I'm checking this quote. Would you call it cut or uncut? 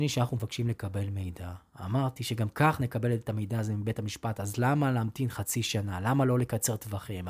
uncut